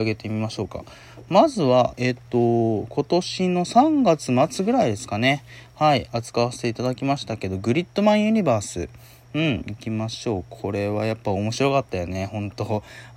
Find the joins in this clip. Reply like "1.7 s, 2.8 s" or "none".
none